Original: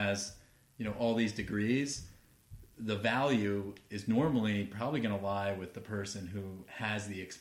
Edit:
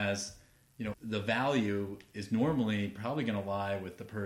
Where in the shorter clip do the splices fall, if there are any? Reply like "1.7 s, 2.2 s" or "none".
0.9 s